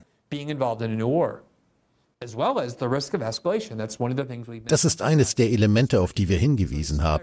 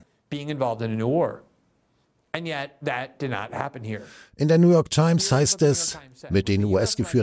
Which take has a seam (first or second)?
first